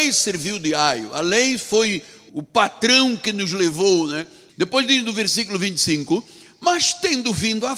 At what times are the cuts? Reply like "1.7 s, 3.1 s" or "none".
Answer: 2.3 s, 4.5 s